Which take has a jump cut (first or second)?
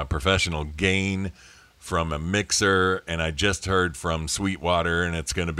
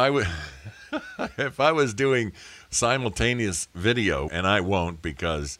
second